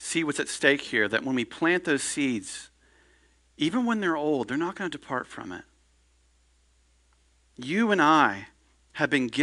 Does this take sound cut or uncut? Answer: uncut